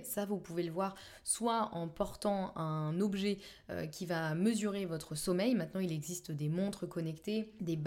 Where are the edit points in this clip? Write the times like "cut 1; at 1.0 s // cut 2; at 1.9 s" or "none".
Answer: none